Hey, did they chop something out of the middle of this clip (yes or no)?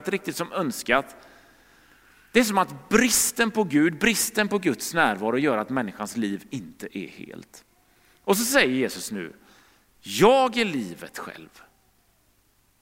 no